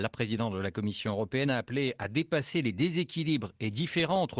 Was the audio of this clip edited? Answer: yes; 1 cut; at 1.4 s

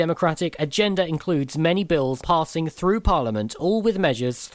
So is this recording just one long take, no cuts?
no; 1 cut; at 2.2 s

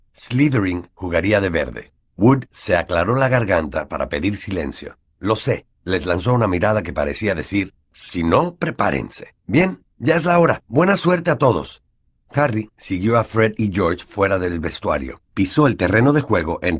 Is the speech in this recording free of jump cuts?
no; 2 cuts; at 5.1 s, 15.2 s

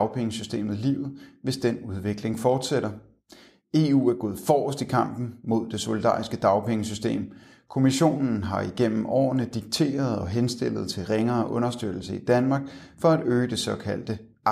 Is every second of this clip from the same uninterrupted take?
yes; 0 cuts

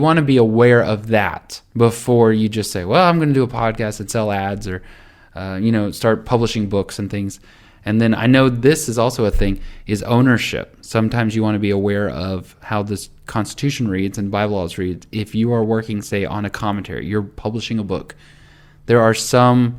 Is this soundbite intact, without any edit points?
yes; 0 cuts

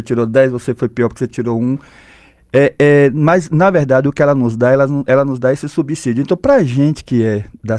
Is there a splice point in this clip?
no; 0 cuts

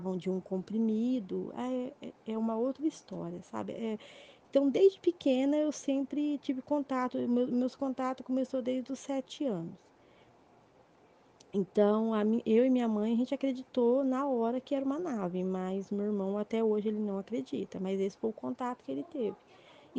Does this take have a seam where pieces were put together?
no; 0 cuts

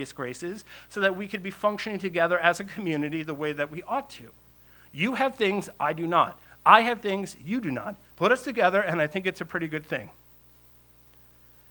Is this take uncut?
yes; 0 cuts

